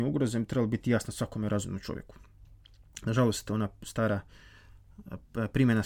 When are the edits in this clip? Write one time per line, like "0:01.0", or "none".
none